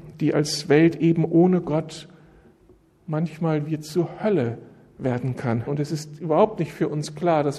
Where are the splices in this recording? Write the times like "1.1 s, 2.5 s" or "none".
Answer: 5.7 s